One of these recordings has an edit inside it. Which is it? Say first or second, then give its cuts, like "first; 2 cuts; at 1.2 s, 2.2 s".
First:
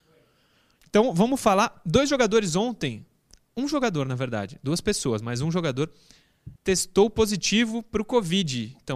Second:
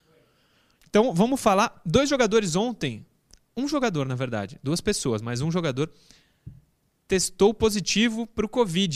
first; 1 cut; at 6.6 s